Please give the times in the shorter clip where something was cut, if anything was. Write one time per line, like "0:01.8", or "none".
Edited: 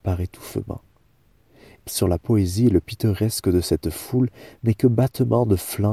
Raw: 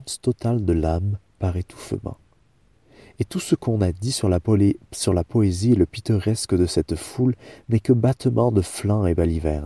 0:01.8